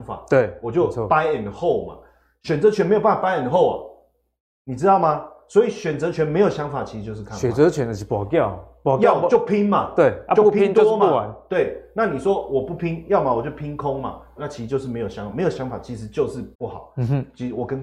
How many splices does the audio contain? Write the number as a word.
two